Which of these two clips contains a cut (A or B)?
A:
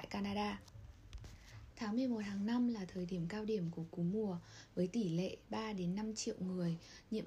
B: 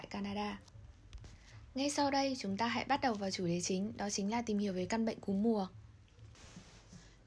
A